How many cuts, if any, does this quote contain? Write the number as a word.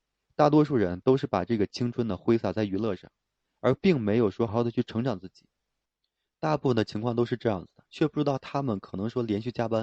two